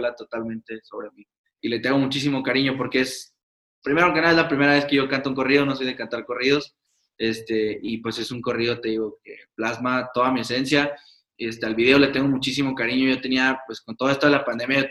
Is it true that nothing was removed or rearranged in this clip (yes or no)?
yes